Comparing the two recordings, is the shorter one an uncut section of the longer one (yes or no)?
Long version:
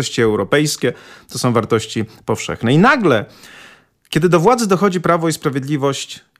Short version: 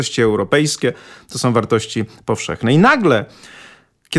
yes